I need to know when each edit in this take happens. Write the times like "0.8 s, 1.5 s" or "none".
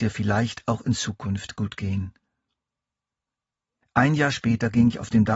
3.8 s